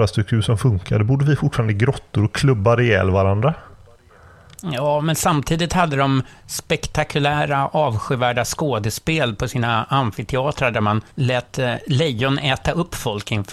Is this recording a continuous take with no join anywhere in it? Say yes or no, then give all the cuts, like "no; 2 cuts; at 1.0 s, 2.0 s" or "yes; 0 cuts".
no; 1 cut; at 11.1 s